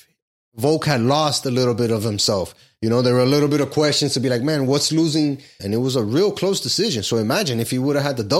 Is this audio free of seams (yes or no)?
no